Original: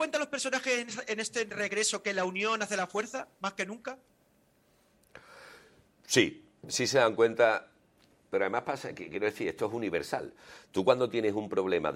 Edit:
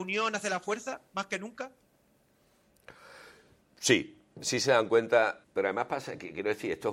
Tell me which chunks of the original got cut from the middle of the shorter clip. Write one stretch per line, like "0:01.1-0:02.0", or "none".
0:07.7-0:08.2